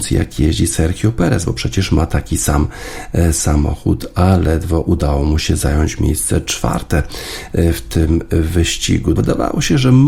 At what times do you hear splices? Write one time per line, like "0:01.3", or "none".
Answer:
0:09.2